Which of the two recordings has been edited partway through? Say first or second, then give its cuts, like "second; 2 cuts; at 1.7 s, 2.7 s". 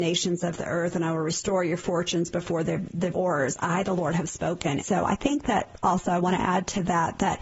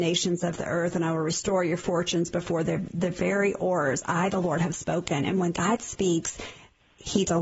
first; 2 cuts; at 3.1 s, 4.8 s